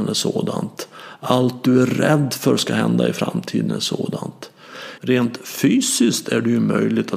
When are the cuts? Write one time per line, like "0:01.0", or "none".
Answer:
0:05.0